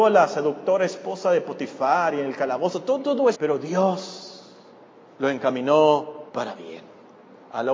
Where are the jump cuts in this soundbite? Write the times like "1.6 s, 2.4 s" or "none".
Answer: 3.3 s, 6.3 s